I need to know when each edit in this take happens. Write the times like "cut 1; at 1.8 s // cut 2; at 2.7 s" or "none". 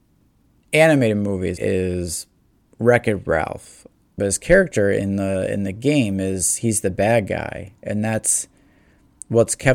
cut 1; at 1.6 s // cut 2; at 4.2 s

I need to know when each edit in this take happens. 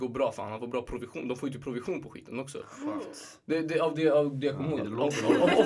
cut 1; at 4.8 s

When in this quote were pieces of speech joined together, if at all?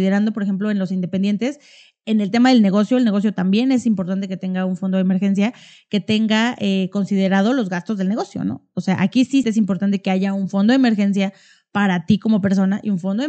cut 1; at 9.4 s

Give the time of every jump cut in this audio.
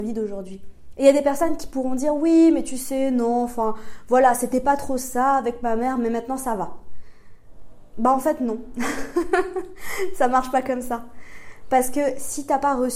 none

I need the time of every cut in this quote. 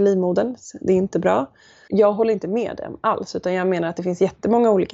cut 1; at 1.9 s

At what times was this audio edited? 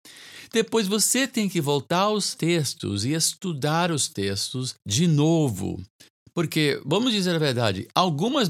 cut 1; at 4.8 s

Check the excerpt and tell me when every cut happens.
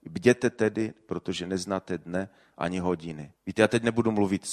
cut 1; at 3.4 s

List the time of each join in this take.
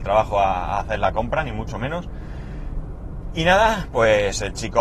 none

